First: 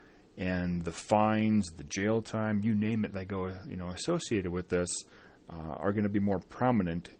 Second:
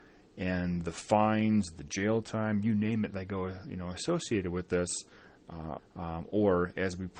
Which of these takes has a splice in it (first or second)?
second